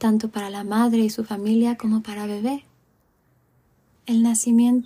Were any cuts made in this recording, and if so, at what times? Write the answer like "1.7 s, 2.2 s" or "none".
3.9 s